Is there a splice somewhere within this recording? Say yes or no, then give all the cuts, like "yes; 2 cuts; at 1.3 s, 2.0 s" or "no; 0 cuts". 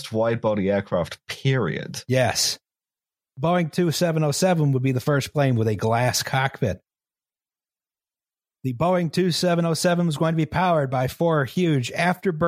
no; 0 cuts